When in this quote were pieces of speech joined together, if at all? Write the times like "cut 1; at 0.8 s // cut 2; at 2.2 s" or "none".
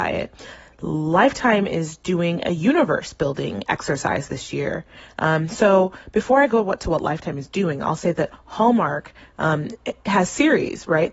none